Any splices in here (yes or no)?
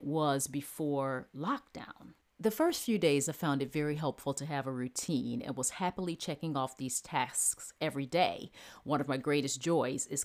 yes